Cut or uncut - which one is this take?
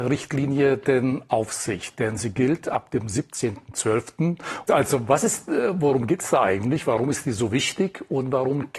cut